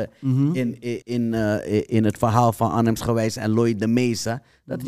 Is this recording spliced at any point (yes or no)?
yes